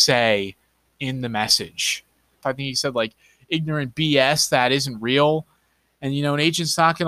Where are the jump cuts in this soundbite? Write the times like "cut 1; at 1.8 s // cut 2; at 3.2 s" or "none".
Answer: cut 1; at 2.4 s